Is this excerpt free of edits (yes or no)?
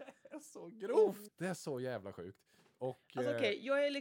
no